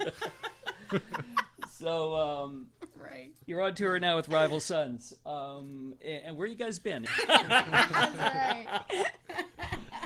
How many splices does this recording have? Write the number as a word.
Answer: one